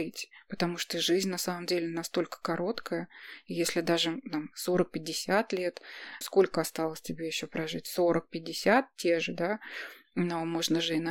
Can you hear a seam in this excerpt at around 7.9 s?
no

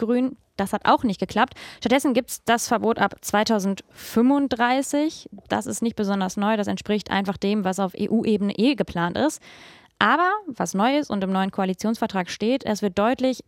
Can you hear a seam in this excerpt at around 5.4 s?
no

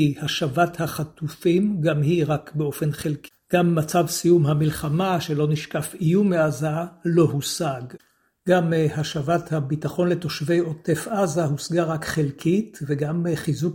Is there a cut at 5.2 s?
no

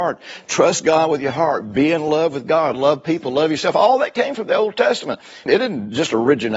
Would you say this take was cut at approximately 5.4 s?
no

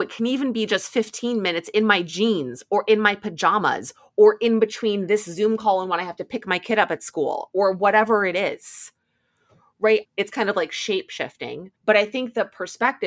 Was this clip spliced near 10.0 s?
yes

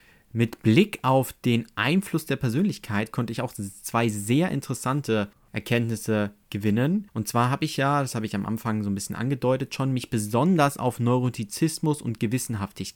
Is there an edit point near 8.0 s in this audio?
no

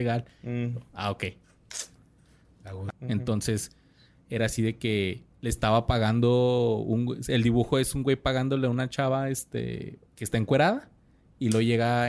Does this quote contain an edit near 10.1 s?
yes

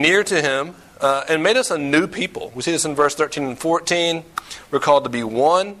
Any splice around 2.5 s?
no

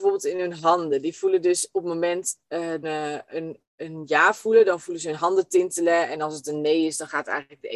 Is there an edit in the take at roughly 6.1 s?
no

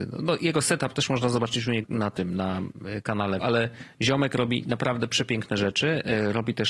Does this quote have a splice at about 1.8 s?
yes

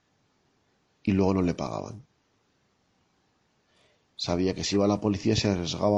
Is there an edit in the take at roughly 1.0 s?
no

